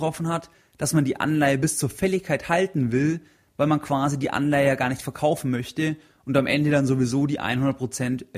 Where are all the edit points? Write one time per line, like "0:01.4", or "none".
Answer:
0:03.5